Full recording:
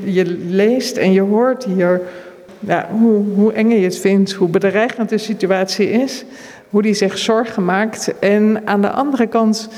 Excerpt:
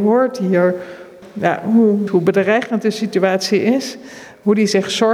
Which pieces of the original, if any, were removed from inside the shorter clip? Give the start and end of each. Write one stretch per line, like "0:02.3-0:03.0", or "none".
0:03.3-0:04.3